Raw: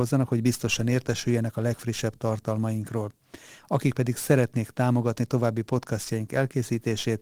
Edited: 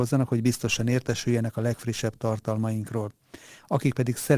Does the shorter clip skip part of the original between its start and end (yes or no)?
no